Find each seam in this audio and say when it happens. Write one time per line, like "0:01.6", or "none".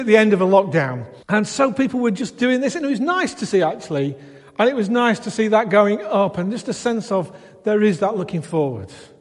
0:01.2